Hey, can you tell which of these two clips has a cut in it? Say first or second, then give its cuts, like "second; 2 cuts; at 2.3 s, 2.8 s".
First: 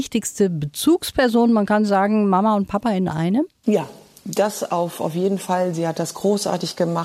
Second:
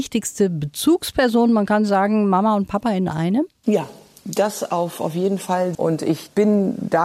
second; 1 cut; at 5.7 s